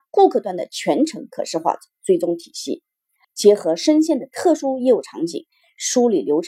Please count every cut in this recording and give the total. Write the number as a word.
one